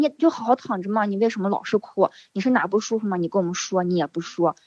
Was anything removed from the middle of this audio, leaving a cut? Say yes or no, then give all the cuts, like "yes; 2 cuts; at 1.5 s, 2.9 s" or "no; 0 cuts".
no; 0 cuts